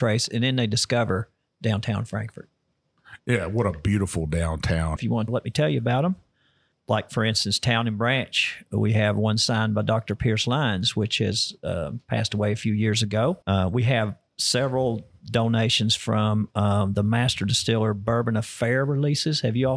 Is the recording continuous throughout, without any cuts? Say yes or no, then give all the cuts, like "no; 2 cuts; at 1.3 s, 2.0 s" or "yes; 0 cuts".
no; 2 cuts; at 5.0 s, 13.4 s